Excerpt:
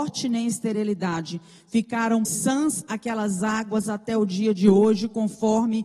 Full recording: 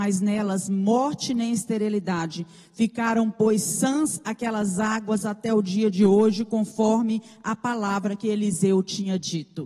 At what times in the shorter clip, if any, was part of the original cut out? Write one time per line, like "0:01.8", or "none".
0:02.2